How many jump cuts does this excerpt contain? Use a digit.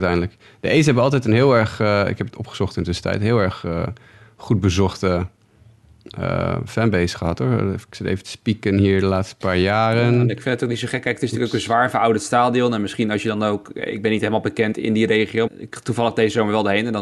2